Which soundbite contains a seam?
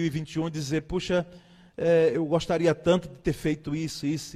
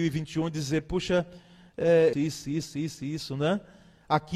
second; 1 cut; at 2.1 s

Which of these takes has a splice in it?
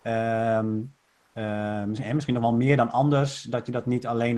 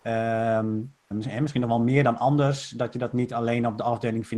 second; 1 cut; at 1.1 s

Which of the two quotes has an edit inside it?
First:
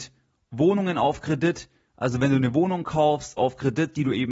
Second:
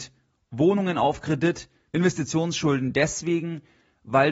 second; 1 cut; at 1.9 s

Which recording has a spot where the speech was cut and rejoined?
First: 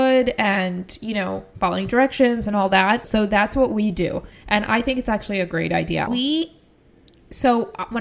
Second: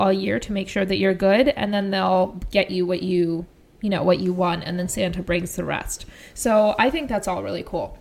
first; 2 cuts; at 3.0 s, 6.1 s

